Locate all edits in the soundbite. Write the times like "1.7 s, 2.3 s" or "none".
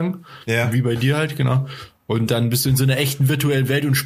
none